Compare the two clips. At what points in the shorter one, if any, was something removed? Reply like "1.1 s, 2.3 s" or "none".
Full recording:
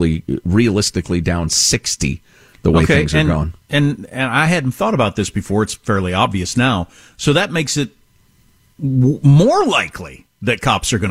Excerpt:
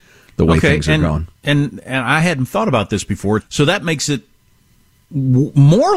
3.4 s